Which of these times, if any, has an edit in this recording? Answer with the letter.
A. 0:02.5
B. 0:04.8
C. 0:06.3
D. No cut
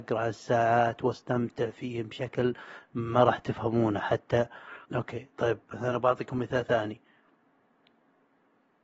B